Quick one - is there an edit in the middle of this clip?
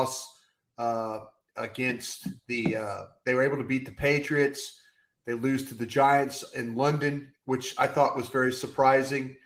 no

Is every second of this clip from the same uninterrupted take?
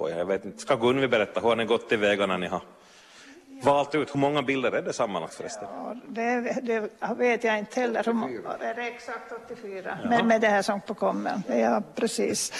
yes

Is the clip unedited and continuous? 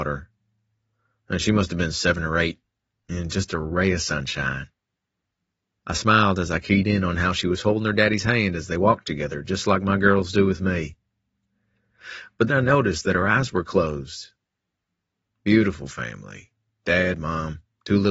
no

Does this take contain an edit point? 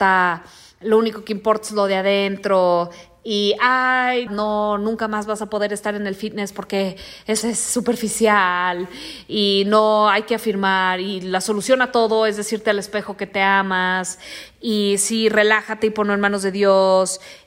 yes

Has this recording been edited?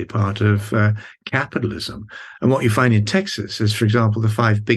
yes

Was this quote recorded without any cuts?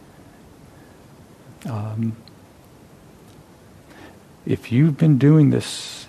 no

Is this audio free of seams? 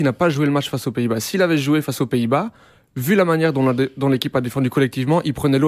yes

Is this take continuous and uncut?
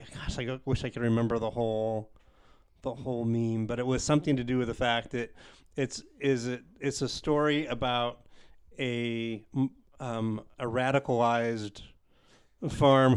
yes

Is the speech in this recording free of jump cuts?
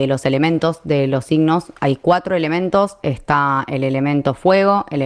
yes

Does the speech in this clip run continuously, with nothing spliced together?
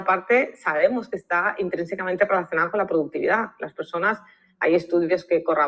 yes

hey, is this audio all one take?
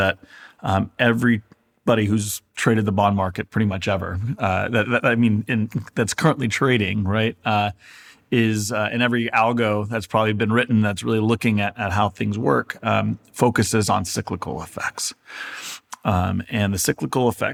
yes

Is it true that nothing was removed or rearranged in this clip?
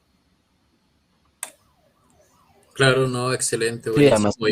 yes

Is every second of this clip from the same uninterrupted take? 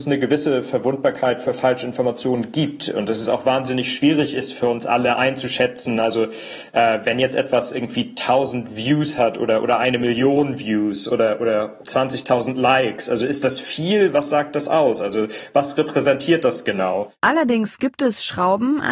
yes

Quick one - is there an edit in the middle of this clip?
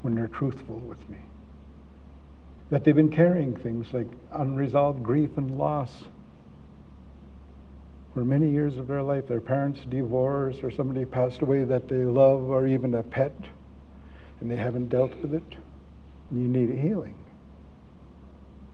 yes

